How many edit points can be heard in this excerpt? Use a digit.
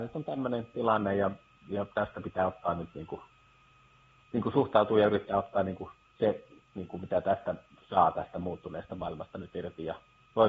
0